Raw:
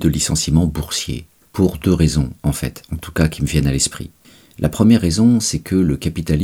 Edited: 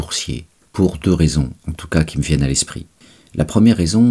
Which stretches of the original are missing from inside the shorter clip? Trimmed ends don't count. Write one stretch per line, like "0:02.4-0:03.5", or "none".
0:02.4-0:02.8